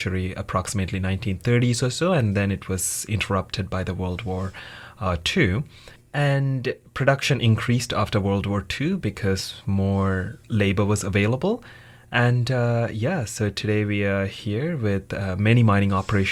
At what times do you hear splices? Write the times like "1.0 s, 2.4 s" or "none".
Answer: none

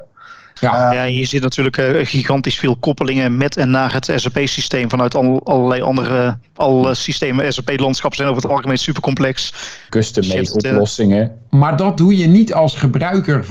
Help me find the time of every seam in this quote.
9.9 s, 11.5 s

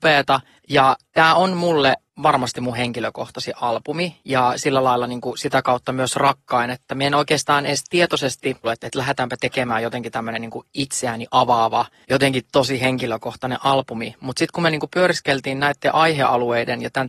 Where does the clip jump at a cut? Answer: 8.6 s

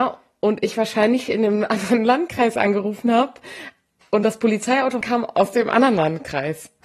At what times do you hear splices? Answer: 5.0 s

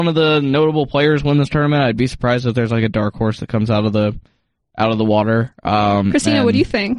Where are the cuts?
none

